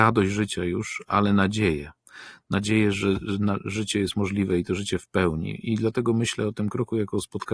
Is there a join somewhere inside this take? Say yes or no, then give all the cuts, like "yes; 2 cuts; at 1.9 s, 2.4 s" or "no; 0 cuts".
no; 0 cuts